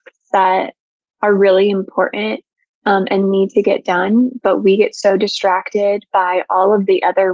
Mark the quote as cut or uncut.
uncut